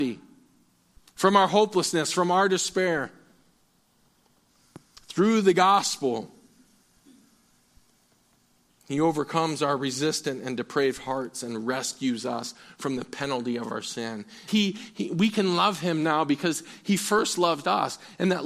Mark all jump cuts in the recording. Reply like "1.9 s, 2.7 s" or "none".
14.5 s